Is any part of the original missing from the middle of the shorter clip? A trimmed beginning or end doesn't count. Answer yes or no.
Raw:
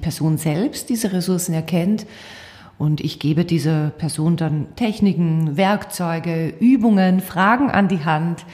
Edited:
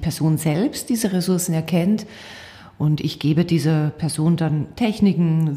no